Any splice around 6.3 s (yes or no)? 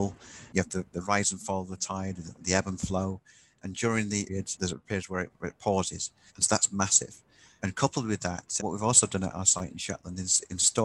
yes